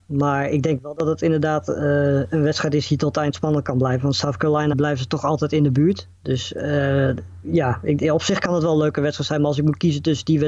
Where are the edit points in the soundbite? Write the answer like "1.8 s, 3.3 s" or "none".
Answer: 4.7 s